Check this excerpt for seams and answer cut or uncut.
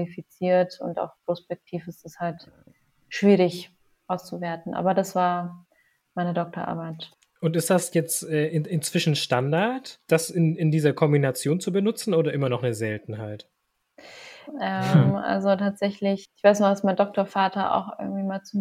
cut